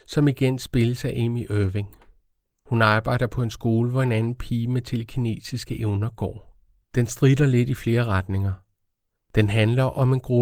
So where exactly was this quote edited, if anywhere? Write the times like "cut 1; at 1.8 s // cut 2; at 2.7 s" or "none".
cut 1; at 6.8 s // cut 2; at 9.2 s